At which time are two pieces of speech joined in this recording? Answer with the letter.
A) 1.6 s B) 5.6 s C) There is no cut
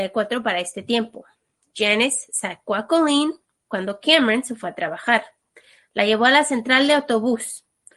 C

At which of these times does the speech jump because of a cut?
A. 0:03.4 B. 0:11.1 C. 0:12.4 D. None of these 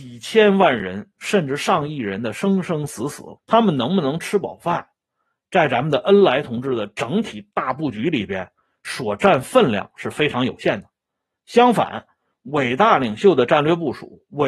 A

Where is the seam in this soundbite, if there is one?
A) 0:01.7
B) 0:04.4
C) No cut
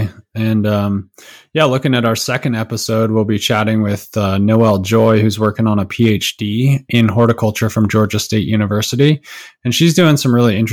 C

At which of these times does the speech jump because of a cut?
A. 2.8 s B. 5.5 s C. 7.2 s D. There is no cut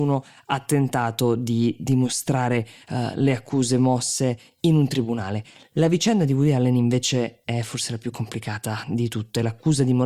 D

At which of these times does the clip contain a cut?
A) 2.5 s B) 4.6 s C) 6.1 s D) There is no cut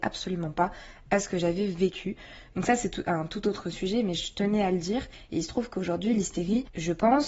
A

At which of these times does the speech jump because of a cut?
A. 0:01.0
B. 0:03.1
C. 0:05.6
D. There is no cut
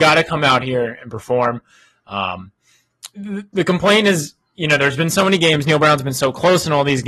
B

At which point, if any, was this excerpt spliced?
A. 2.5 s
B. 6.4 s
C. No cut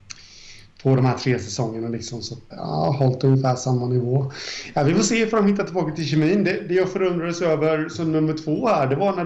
A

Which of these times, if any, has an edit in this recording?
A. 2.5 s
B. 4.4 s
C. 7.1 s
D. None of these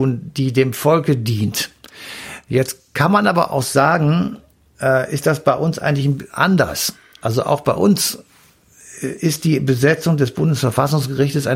D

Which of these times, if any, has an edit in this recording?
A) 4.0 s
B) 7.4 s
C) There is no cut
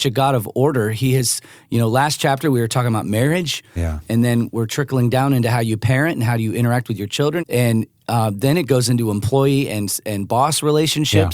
B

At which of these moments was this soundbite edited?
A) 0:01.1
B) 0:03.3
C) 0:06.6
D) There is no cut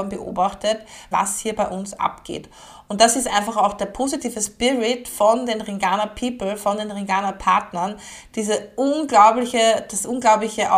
A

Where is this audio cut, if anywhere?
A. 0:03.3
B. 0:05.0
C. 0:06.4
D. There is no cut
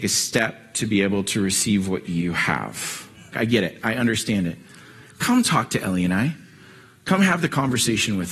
A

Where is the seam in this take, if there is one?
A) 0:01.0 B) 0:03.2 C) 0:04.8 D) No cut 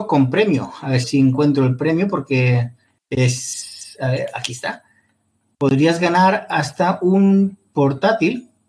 A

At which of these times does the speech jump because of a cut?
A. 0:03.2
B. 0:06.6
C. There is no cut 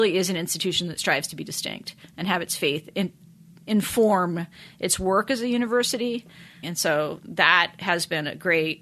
B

